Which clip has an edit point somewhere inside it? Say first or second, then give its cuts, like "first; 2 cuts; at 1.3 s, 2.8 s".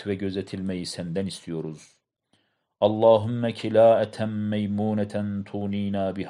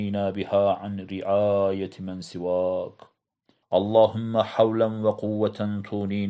second; 1 cut; at 3.6 s